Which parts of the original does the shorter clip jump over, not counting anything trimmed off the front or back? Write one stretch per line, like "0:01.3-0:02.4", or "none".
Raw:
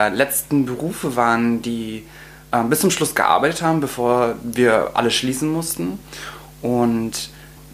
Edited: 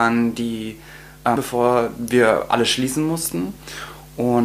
0:02.6-0:03.8